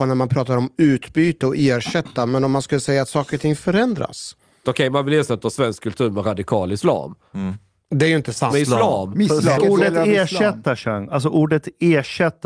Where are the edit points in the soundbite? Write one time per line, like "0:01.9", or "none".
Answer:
0:04.6
0:08.5
0:09.5